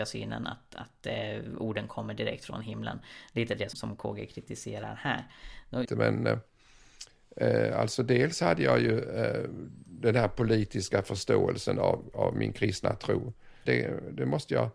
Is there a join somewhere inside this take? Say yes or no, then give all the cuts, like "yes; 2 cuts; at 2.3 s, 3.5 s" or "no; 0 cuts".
yes; 3 cuts; at 3.7 s, 5.8 s, 13.7 s